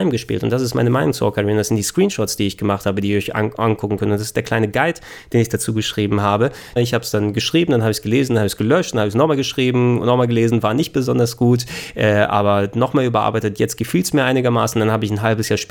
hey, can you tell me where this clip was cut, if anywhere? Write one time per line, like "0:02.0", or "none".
0:06.8